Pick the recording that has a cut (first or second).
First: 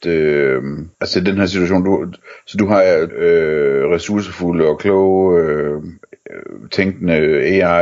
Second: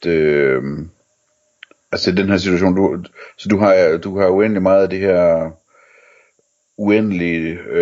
first